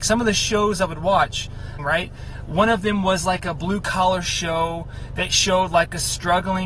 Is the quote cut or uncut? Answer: cut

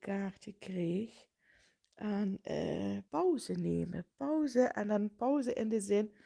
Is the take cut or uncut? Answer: cut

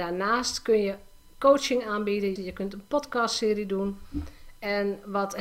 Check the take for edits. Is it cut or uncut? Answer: cut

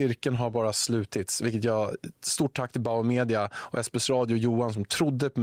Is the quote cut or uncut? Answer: uncut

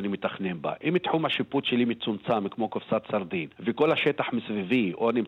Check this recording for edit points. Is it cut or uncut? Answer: cut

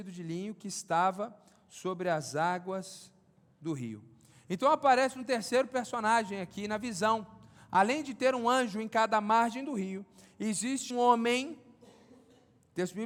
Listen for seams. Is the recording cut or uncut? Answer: cut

